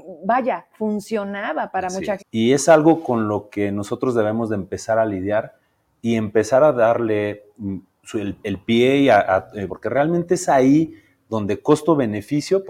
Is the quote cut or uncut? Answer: cut